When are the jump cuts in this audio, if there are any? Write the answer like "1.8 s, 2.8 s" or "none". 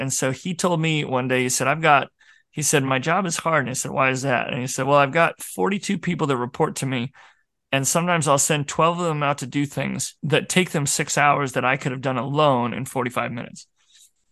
none